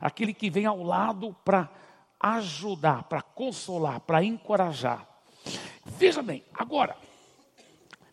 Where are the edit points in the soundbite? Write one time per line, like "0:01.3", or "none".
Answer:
0:05.8